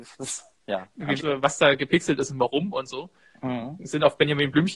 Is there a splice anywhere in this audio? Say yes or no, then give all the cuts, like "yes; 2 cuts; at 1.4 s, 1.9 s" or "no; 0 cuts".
yes; 1 cut; at 1.2 s